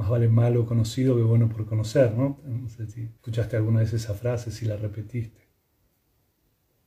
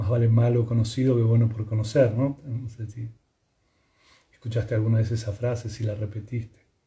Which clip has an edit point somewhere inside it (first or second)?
first